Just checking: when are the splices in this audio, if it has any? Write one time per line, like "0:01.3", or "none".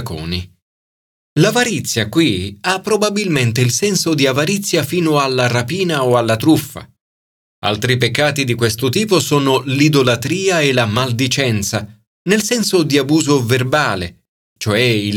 none